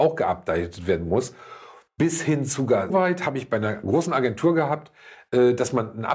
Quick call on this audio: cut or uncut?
cut